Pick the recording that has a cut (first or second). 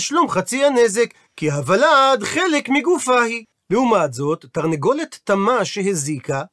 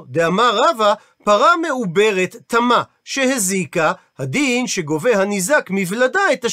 first